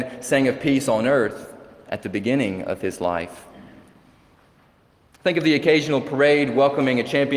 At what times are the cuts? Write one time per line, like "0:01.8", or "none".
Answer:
none